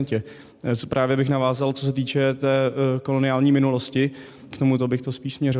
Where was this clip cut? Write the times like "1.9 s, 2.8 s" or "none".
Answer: 1.7 s, 4.5 s